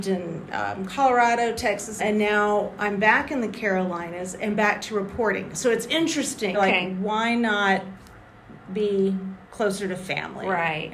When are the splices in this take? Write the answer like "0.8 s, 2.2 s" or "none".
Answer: 2.0 s, 6.5 s, 9.4 s